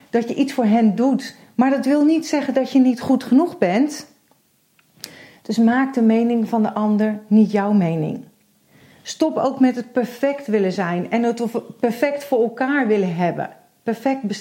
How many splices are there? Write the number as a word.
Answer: zero